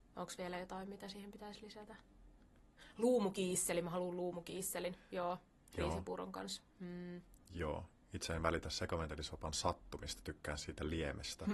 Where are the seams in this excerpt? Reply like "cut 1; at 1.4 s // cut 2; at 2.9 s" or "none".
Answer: cut 1; at 7.4 s